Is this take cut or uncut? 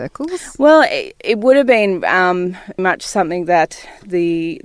cut